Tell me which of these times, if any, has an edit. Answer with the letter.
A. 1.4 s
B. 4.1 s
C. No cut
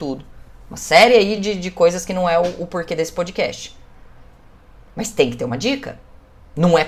C